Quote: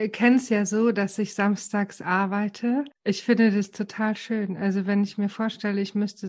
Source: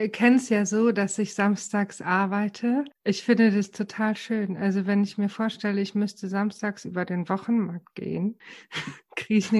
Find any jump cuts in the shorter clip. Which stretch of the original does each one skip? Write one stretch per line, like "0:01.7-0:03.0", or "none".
none